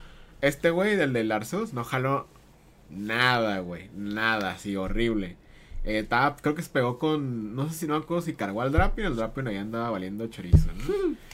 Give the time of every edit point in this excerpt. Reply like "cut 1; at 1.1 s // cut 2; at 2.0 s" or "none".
none